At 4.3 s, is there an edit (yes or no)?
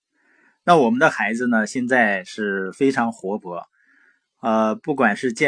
no